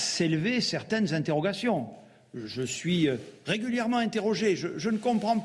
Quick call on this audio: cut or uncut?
uncut